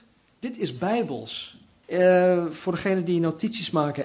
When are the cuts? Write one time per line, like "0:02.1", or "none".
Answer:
0:01.8